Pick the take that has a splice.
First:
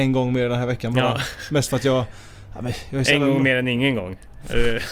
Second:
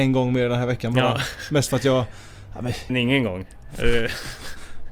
second; 1 cut; at 2.9 s

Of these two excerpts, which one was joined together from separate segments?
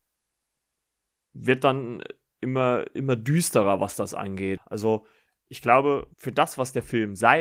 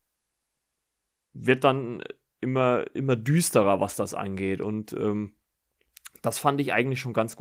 first; 2 cuts; at 4.6 s, 6.1 s

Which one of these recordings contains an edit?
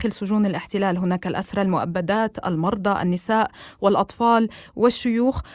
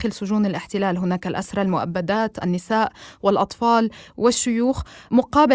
second; 1 cut; at 2.4 s

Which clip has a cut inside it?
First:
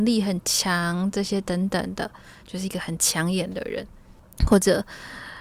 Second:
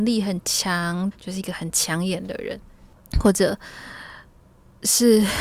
second; 1 cut; at 1.1 s

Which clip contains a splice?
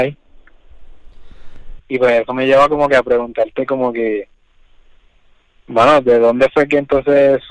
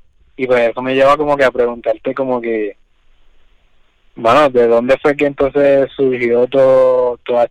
first; 1 cut; at 1.8 s

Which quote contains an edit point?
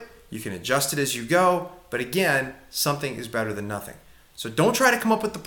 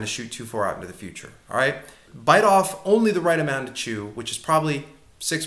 second; 1 cut; at 2.1 s

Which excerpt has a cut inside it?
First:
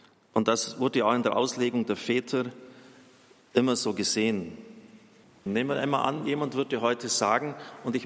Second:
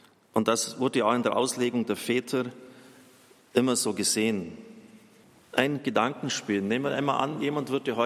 first; 1 cut; at 5.5 s

